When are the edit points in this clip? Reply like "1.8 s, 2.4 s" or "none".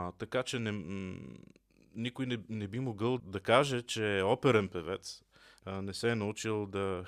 3.2 s, 5.6 s